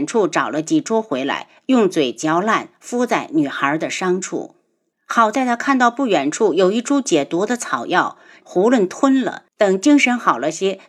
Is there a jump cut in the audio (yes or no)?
yes